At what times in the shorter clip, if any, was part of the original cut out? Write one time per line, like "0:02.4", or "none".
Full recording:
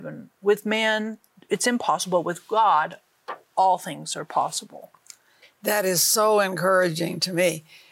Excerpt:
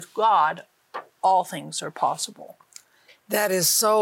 none